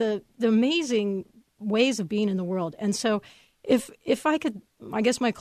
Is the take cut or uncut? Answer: uncut